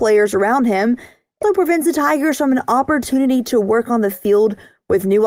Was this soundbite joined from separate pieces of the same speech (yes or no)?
yes